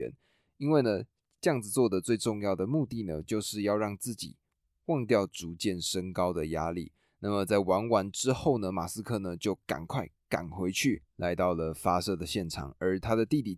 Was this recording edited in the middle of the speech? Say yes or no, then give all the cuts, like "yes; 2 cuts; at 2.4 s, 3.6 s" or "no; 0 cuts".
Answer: no; 0 cuts